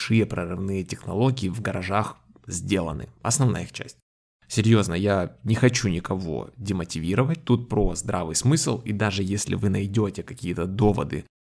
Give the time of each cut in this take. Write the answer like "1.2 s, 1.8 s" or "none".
4.3 s

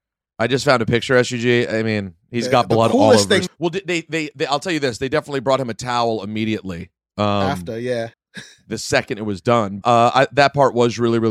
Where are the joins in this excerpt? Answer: 3.5 s, 8.1 s, 9.8 s

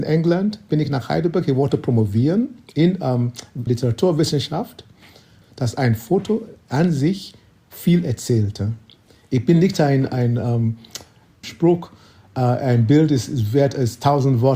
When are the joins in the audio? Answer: 3.7 s, 5.4 s, 11.4 s

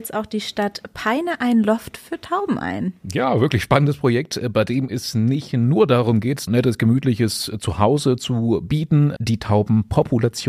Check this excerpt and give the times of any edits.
6.5 s, 9.2 s

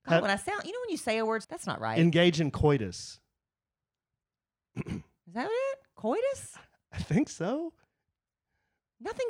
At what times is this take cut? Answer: 1.4 s

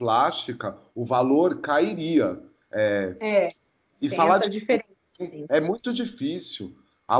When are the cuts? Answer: 2.6 s

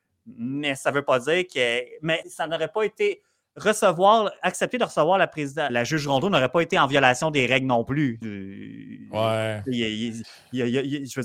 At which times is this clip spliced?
2.2 s, 5.7 s, 8.2 s

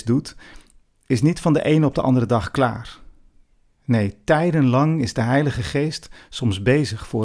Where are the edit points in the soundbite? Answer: none

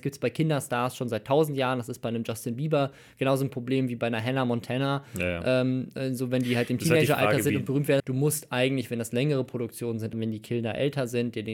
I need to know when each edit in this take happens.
8.0 s, 10.1 s

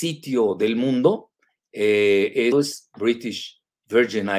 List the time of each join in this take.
2.5 s

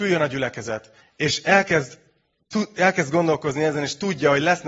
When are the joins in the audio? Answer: 1.0 s

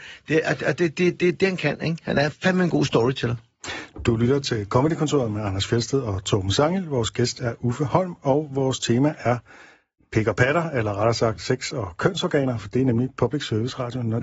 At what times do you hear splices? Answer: none

